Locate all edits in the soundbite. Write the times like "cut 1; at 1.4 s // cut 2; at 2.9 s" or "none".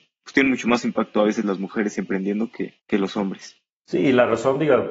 cut 1; at 2.8 s